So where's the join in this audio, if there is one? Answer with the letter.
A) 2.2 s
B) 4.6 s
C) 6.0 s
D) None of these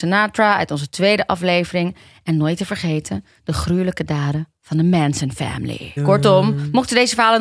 C